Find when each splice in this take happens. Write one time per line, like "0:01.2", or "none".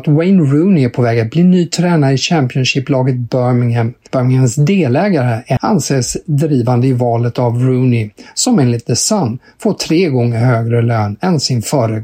0:05.6